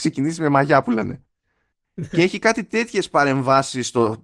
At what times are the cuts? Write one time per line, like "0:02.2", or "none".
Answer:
none